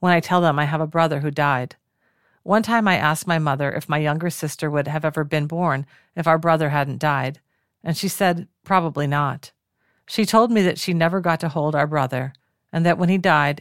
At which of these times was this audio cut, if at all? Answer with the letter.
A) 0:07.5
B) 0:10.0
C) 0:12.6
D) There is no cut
B